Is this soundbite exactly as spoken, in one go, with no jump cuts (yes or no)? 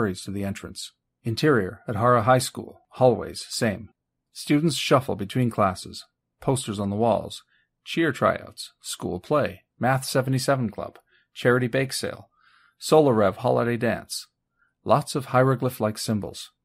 no